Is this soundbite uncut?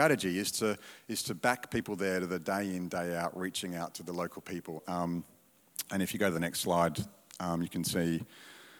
no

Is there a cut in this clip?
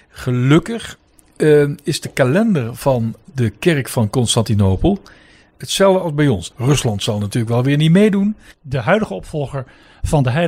yes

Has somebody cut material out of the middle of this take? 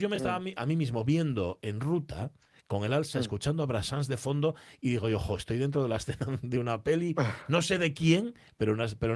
no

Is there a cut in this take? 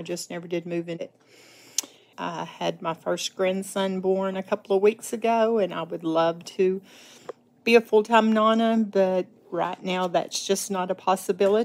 yes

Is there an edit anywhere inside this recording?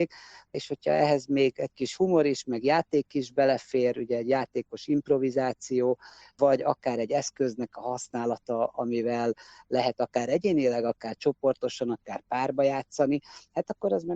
no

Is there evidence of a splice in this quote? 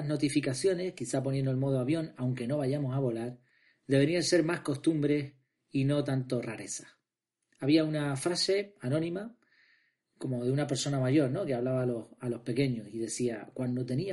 no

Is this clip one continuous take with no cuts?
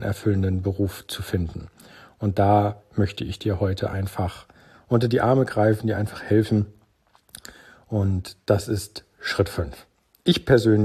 yes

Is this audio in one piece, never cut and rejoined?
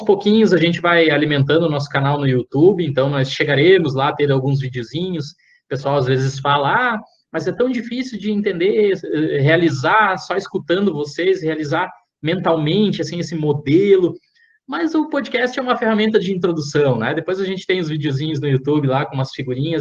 yes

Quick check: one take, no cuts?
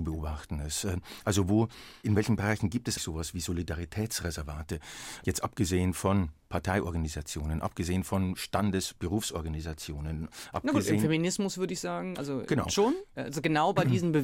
no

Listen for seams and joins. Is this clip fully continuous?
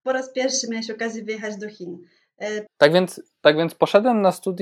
no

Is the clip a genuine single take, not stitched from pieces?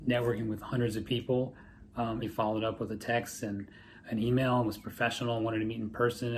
no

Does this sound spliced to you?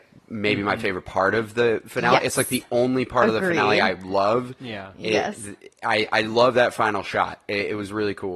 no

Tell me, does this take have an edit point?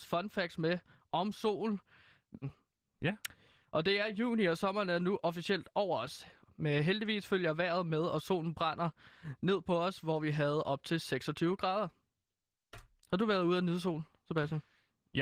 yes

